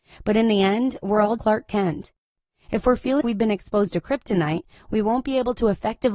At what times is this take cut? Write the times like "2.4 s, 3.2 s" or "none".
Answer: 1.4 s, 3.2 s